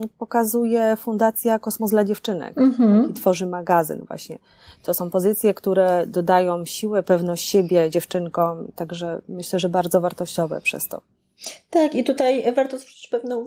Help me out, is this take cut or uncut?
uncut